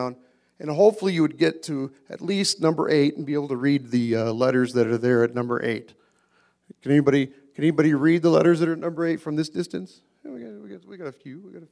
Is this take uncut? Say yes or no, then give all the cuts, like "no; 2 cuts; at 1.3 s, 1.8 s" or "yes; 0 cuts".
yes; 0 cuts